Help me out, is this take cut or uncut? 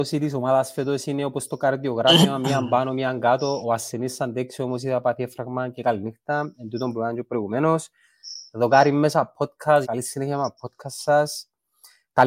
cut